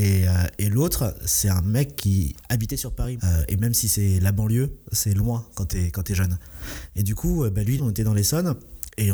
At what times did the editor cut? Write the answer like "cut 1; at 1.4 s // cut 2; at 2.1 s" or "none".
cut 1; at 3.2 s // cut 2; at 7.8 s